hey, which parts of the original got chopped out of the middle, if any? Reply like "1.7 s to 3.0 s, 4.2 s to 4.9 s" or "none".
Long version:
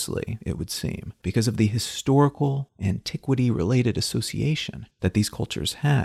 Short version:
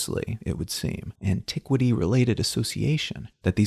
1.2 s to 2.7 s